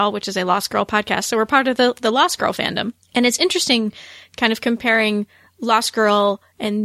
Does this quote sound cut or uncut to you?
cut